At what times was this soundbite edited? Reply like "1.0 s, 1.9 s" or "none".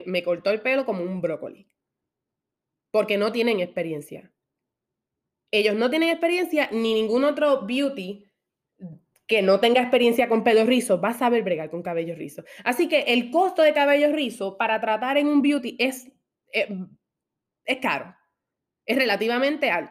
none